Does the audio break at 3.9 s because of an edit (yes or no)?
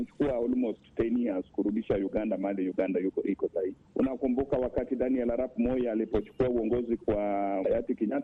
no